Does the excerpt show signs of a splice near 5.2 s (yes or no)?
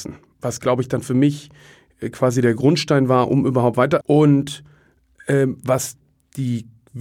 no